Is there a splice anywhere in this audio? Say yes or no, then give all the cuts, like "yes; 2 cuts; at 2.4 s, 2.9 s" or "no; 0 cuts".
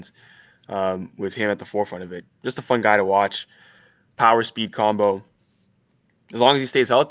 no; 0 cuts